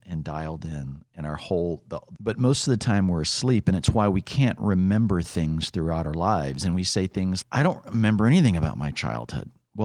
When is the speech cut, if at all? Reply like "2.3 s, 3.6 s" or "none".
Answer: 2.1 s, 7.4 s